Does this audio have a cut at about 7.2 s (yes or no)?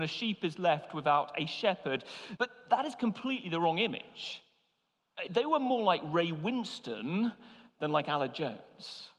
no